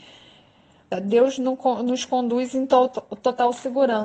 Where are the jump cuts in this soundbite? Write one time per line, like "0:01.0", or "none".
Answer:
0:00.9